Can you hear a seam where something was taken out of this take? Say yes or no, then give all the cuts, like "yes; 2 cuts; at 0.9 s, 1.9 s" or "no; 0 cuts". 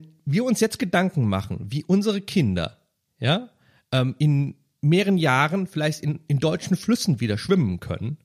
no; 0 cuts